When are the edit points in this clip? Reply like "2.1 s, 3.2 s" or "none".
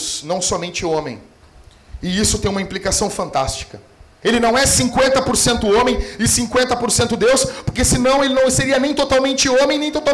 4.2 s